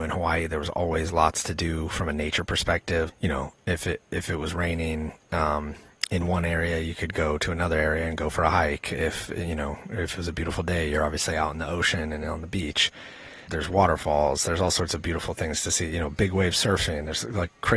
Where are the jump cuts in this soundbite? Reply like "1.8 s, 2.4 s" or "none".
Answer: 3.1 s, 13.5 s